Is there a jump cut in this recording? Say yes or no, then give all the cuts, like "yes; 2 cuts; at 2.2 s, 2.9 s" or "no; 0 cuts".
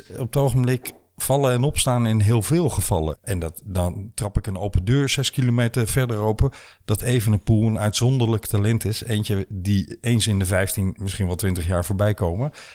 yes; 1 cut; at 3.2 s